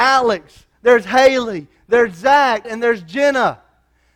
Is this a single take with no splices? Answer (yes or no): no